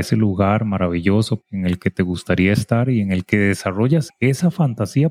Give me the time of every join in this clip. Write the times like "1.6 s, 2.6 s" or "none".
1.4 s, 4.1 s